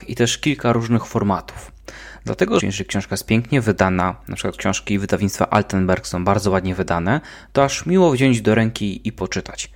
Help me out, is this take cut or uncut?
cut